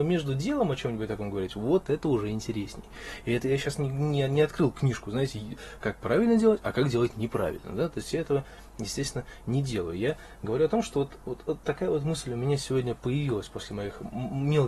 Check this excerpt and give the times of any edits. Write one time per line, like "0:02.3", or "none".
0:05.8